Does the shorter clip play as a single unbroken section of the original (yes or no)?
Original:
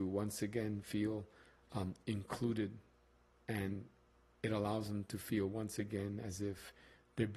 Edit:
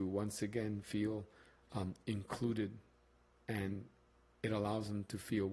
yes